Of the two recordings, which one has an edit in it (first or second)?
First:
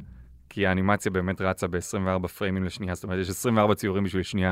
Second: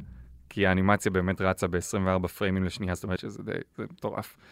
second